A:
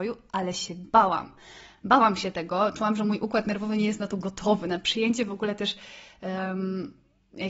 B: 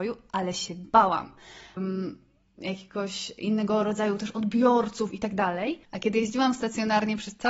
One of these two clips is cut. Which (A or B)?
B